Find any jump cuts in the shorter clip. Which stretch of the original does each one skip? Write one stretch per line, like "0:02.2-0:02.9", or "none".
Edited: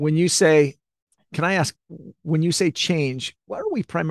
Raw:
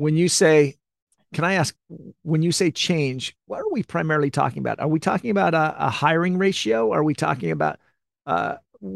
none